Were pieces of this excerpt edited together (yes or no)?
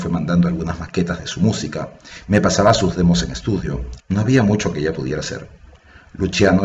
yes